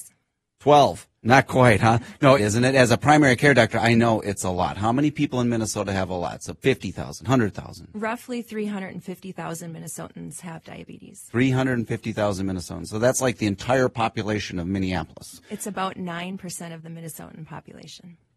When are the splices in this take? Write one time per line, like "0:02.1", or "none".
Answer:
0:01.2
0:02.4